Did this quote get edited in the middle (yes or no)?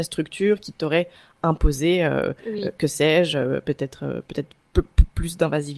no